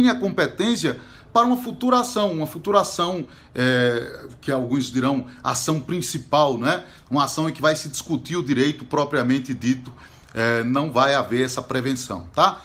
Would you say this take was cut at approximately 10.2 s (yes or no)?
no